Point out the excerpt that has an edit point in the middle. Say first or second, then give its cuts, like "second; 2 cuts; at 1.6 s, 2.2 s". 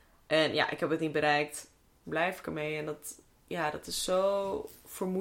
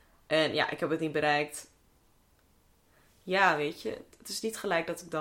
first; 1 cut; at 2.0 s